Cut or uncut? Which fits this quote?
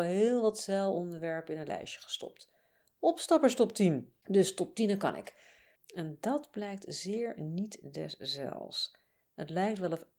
cut